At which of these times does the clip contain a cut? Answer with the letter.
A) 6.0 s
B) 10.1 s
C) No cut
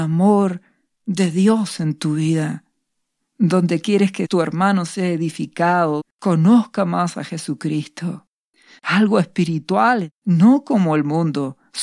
A